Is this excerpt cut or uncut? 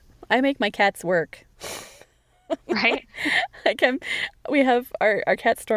uncut